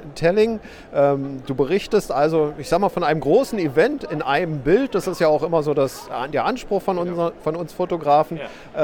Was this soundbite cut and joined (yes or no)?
no